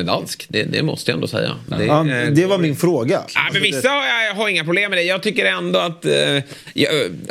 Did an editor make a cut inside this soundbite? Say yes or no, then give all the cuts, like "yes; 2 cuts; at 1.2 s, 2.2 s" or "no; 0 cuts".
yes; 1 cut; at 3.3 s